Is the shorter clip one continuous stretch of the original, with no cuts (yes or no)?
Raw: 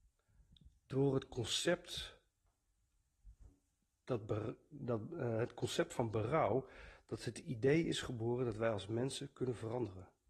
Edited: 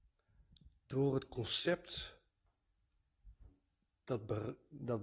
yes